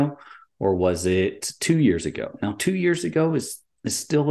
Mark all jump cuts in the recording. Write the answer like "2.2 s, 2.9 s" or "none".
none

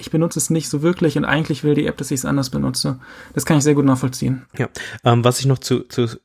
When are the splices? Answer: 4.5 s

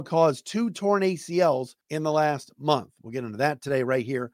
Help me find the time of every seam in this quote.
1.8 s

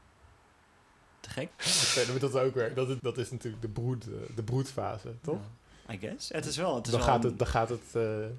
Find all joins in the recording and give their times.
1.5 s, 3.0 s

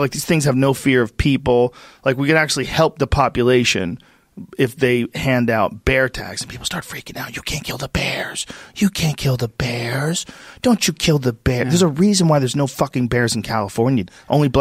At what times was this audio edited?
none

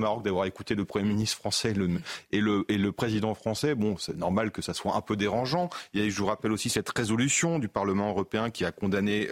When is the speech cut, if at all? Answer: none

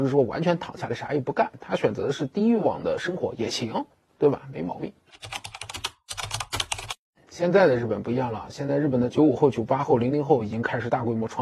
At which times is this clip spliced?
none

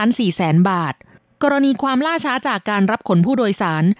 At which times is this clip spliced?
none

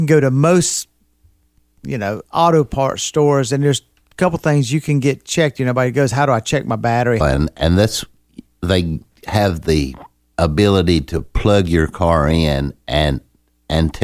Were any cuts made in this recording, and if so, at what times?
7.2 s

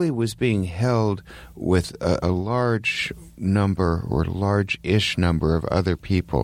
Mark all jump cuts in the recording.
2.2 s

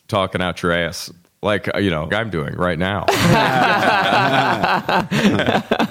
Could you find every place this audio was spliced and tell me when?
2.1 s

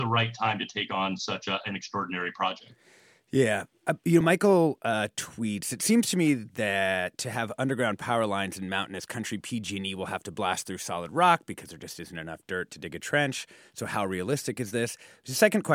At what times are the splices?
none

